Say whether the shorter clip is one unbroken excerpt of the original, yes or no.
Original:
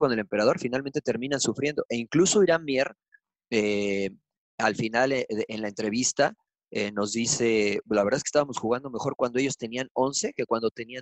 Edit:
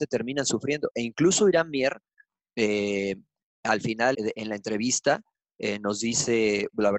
no